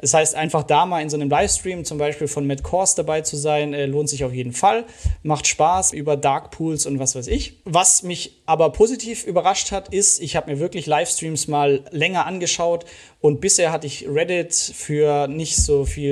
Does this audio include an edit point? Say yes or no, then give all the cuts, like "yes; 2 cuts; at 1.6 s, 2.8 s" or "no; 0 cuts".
yes; 2 cuts; at 5.9 s, 7.6 s